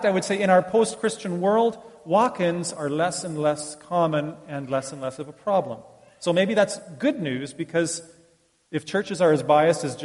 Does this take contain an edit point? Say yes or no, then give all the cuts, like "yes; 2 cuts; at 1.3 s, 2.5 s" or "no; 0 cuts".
no; 0 cuts